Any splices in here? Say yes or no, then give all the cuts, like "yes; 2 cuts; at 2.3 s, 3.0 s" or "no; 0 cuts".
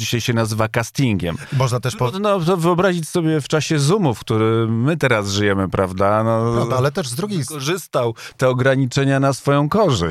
no; 0 cuts